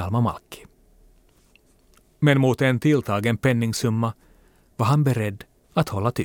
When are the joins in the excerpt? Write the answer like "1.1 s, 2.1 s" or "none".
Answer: none